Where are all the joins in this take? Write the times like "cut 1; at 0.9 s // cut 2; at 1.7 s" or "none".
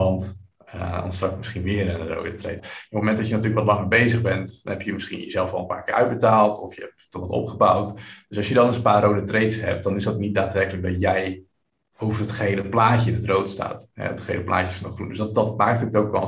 cut 1; at 2.6 s